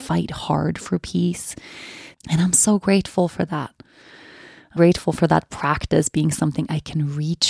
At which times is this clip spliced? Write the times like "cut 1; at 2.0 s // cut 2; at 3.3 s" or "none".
cut 1; at 2.1 s // cut 2; at 4.8 s

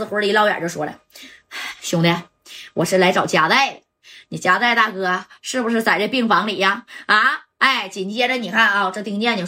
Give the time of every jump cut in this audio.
none

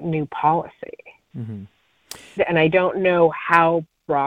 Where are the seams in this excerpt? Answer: cut 1; at 2.4 s

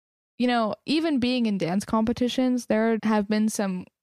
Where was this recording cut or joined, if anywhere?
cut 1; at 3.0 s

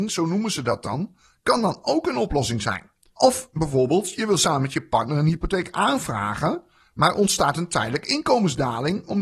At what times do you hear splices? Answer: cut 1; at 3.1 s

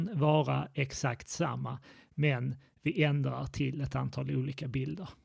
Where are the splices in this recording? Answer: none

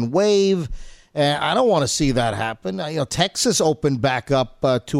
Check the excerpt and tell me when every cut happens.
none

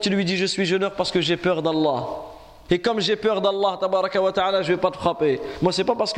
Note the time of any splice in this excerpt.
cut 1; at 2.7 s

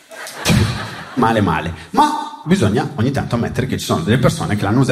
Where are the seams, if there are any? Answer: cut 1; at 1.2 s // cut 2; at 2.4 s

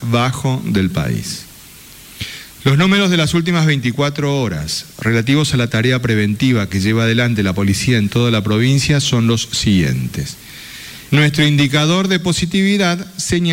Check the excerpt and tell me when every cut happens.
cut 1; at 2.6 s // cut 2; at 11.1 s

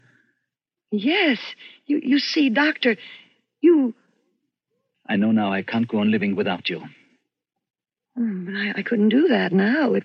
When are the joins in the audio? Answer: cut 1; at 4.9 s // cut 2; at 8.1 s

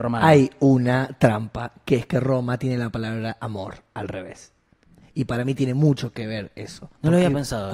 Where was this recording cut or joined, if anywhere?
none

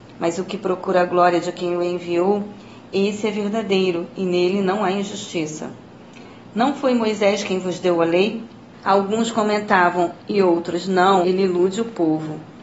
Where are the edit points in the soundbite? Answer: cut 1; at 8.7 s // cut 2; at 10.2 s // cut 3; at 11.2 s

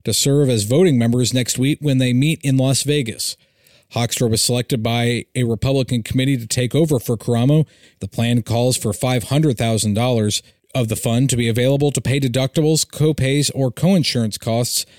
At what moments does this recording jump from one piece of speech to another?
cut 1; at 7.9 s

